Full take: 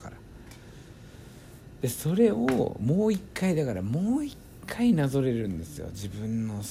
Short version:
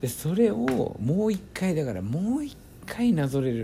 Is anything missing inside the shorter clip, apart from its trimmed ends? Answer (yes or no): no